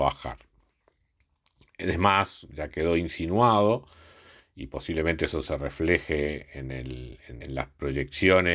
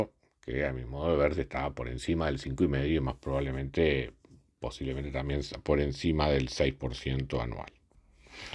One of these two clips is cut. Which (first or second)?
first